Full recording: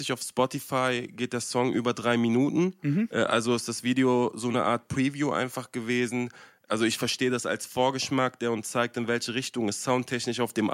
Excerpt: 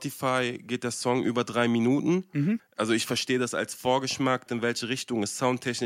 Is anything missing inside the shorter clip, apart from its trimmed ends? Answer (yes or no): yes